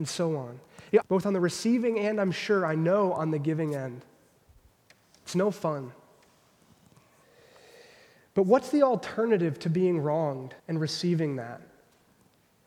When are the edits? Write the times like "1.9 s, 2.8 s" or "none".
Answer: 1.0 s, 10.6 s